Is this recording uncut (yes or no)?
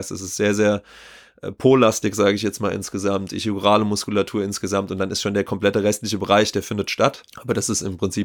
no